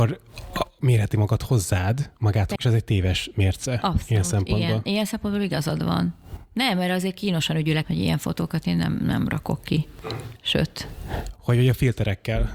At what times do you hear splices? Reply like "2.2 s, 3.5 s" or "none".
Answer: 2.5 s, 7.8 s